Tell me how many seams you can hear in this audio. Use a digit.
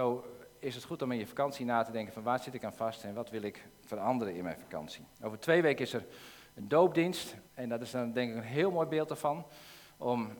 2